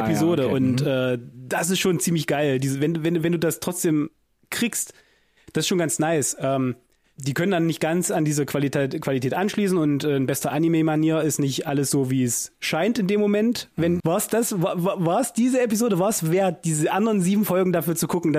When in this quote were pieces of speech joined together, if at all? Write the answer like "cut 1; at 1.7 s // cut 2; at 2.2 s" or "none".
cut 1; at 14.0 s